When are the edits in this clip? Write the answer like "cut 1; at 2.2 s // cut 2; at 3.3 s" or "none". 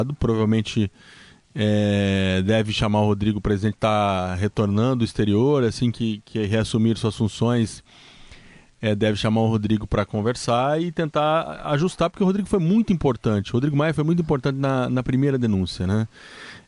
none